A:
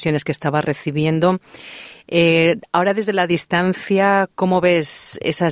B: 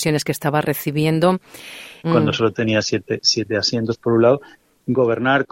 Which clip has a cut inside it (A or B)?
B